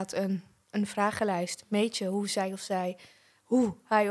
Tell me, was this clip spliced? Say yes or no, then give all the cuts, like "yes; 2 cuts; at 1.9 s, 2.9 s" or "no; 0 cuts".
no; 0 cuts